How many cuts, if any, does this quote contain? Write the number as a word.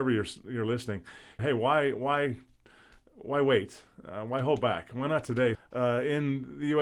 two